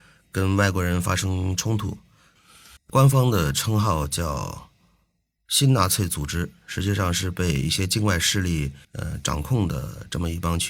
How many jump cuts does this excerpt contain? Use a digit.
2